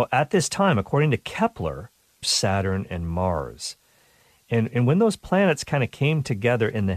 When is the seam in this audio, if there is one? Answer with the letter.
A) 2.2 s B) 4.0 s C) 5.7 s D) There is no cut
A